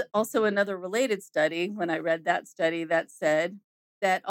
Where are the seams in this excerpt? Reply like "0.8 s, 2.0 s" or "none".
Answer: none